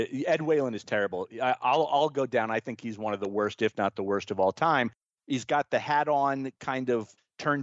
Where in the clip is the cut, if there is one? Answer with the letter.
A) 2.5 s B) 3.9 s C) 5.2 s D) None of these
C